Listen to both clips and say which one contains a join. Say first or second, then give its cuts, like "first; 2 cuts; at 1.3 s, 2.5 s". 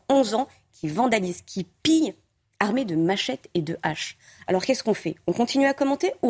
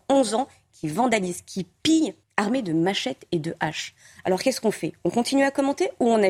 second; 1 cut; at 2.2 s